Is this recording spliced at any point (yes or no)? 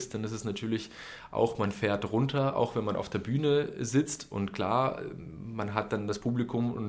no